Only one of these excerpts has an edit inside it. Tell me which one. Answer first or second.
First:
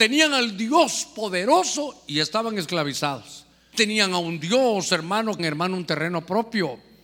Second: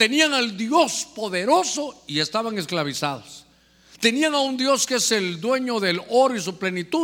first